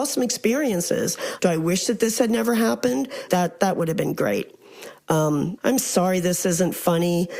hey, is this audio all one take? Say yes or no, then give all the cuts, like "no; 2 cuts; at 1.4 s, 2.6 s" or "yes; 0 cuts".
no; 3 cuts; at 1.4 s, 3.3 s, 5.6 s